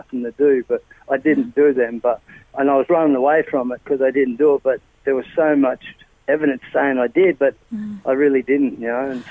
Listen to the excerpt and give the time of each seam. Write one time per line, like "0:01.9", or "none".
none